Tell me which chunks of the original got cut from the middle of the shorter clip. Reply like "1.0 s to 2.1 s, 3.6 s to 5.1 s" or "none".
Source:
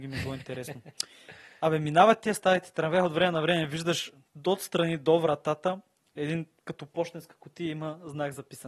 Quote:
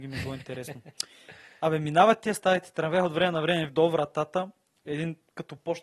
3.7 s to 5.0 s